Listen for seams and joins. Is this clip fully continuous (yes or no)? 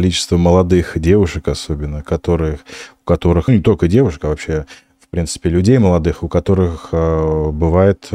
no